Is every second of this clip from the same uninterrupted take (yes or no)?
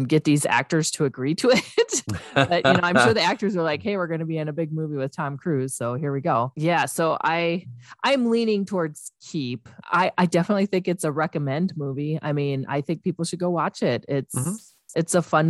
yes